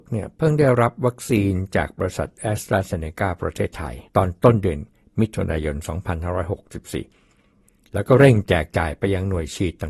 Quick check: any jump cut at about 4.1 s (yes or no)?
yes